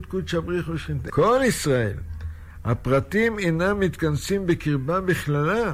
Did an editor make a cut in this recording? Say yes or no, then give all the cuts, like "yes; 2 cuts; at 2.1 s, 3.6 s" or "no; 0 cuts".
yes; 1 cut; at 1.1 s